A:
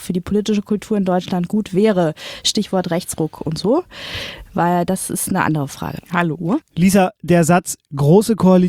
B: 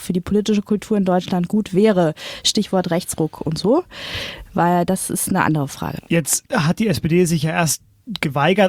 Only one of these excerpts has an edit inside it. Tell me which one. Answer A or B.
A